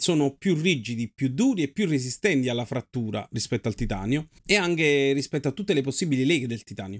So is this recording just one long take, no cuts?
no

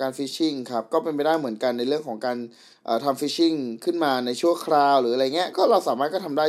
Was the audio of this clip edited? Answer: yes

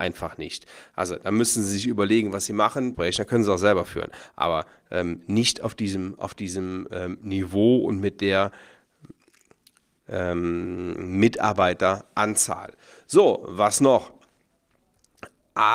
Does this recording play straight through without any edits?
no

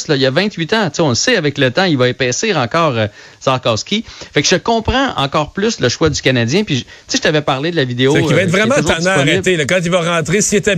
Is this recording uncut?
yes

